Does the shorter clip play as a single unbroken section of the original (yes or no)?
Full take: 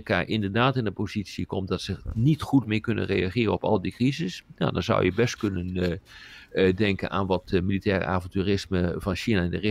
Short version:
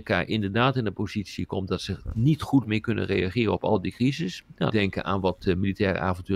no